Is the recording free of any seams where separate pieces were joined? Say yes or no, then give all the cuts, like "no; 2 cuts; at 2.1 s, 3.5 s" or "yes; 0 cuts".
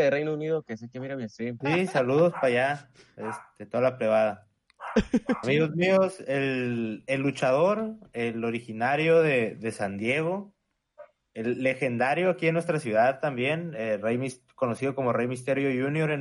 no; 2 cuts; at 1.6 s, 5.4 s